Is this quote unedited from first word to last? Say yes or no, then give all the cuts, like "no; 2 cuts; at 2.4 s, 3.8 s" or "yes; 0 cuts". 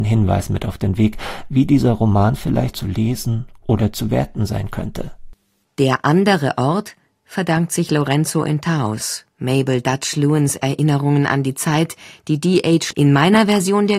no; 1 cut; at 12.9 s